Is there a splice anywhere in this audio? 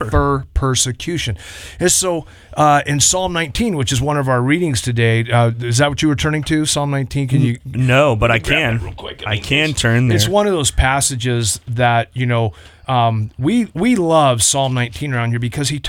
no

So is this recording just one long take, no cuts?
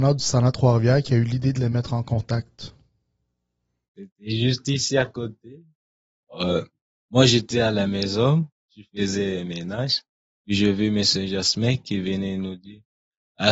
yes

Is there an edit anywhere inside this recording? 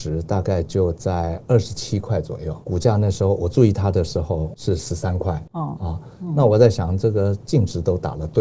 no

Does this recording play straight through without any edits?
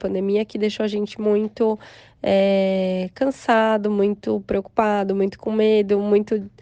yes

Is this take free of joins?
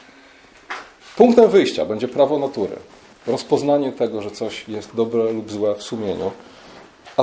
yes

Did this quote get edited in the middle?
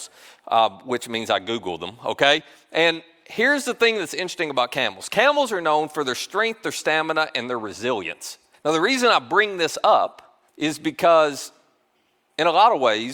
yes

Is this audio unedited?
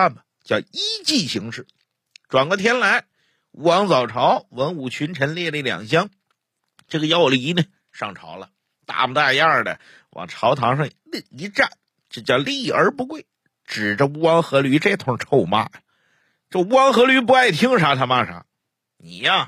yes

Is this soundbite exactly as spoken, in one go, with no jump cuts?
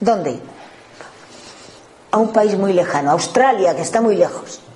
yes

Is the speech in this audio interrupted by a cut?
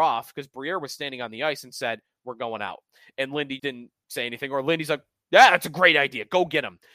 yes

